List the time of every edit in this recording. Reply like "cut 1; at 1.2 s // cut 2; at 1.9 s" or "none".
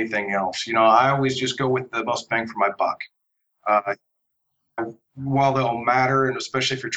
cut 1; at 4.8 s